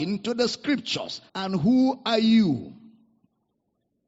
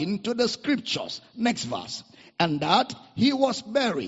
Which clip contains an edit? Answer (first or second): first